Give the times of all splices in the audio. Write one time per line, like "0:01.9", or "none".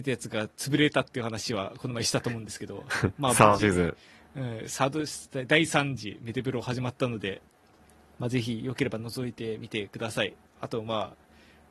none